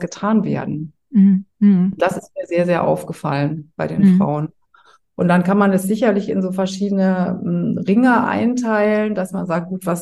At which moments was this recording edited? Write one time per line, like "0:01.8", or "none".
none